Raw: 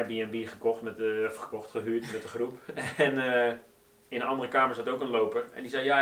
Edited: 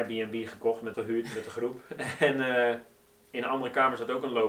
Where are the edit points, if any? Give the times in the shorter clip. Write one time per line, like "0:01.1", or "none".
0:00.9

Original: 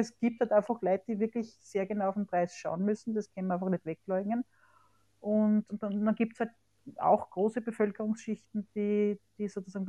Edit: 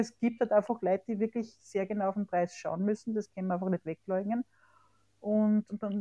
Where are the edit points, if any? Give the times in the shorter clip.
none

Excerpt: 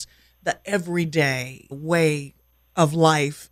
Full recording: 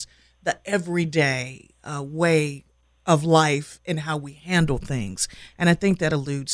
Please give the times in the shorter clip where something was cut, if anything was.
0:01.7

